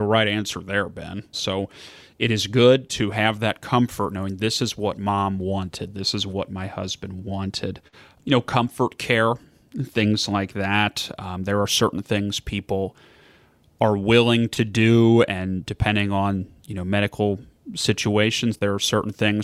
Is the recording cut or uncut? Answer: cut